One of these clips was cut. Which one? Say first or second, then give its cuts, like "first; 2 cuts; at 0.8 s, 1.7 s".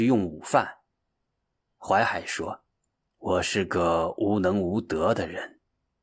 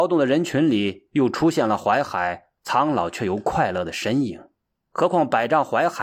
second; 1 cut; at 4.8 s